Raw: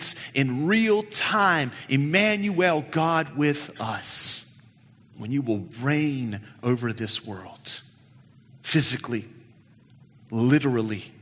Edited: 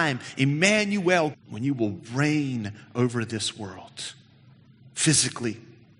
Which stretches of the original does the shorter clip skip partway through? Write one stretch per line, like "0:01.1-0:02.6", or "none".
0:02.9-0:05.0